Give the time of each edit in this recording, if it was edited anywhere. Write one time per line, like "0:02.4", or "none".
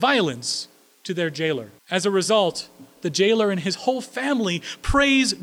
0:01.8